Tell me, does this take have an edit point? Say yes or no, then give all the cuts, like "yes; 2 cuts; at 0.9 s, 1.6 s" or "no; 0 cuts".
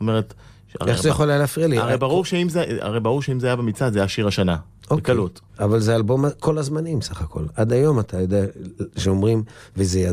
yes; 1 cut; at 5.5 s